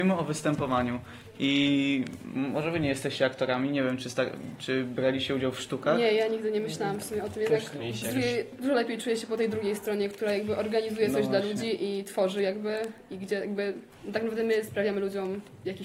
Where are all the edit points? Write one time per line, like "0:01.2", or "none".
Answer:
none